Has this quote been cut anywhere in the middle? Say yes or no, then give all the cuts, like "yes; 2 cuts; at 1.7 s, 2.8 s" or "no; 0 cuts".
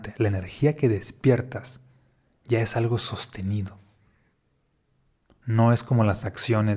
no; 0 cuts